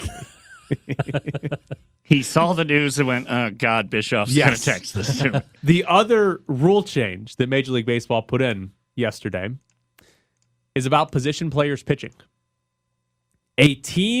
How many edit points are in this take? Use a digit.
1